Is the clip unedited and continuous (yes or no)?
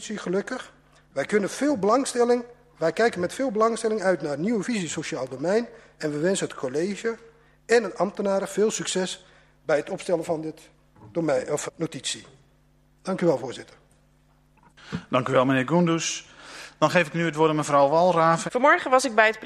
no